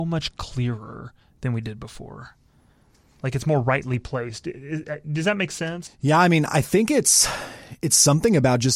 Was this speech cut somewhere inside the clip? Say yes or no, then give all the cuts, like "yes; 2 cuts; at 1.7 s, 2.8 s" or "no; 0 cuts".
yes; 1 cut; at 5.9 s